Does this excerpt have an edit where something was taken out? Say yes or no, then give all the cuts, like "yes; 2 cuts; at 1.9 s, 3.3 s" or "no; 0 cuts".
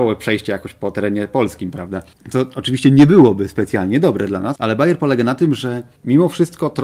no; 0 cuts